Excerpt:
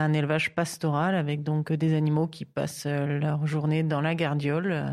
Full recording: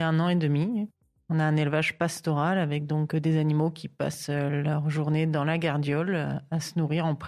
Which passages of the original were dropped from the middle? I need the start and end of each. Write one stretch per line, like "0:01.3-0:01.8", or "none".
none